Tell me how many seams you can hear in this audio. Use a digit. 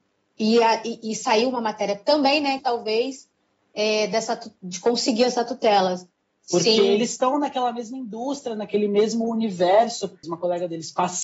3